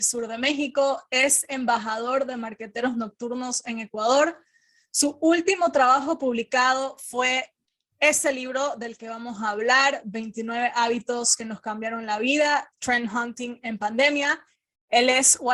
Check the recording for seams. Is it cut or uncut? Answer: uncut